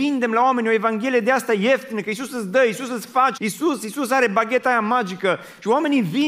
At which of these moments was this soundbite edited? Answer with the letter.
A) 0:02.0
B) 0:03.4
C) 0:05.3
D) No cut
B